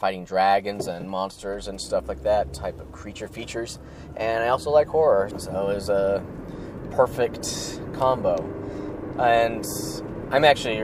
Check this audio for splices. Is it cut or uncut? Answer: cut